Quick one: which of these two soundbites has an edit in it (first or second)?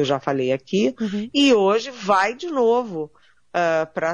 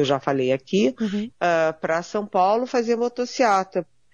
second